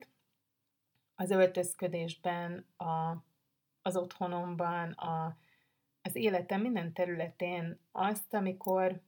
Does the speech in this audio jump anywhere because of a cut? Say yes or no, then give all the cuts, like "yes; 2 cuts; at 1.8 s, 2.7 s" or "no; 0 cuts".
no; 0 cuts